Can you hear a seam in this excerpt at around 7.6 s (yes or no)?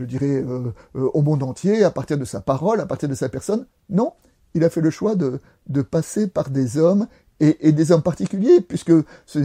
no